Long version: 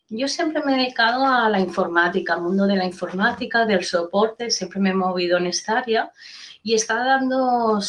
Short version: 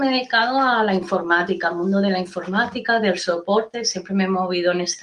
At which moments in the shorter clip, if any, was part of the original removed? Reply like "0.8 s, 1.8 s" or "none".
none